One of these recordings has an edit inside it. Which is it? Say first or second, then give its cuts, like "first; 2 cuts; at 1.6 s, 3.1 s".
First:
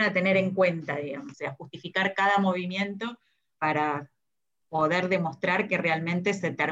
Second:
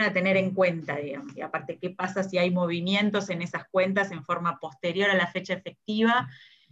first; 2 cuts; at 1.3 s, 3.6 s